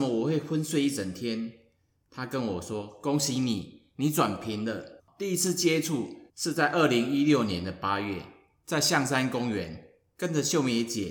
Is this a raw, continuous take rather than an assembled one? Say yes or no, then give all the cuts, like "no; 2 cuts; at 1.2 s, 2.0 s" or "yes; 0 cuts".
no; 2 cuts; at 5.0 s, 6.3 s